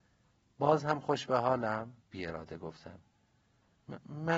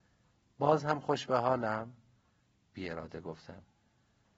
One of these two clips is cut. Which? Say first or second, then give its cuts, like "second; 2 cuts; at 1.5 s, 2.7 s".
first; 1 cut; at 2.0 s